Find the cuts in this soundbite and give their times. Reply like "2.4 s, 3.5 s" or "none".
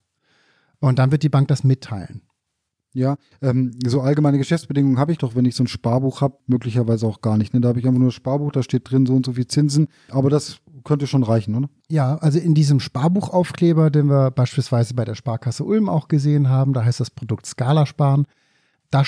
none